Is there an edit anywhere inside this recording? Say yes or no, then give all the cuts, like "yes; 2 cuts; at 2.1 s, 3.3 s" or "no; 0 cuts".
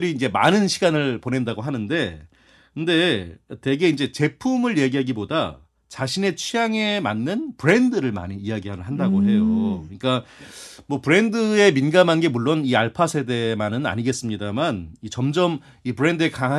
no; 0 cuts